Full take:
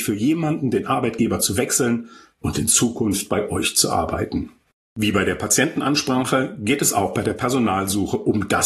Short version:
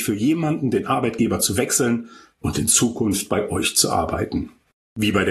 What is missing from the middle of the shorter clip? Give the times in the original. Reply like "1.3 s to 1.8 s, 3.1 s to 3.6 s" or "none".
none